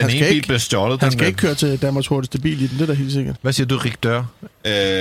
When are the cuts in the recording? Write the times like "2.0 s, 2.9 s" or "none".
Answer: 3.4 s